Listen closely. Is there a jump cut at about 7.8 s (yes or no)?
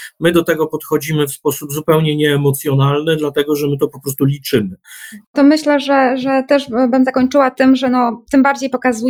no